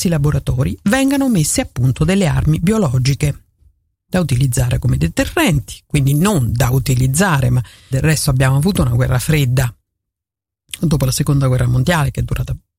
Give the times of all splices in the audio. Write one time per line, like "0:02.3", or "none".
0:07.9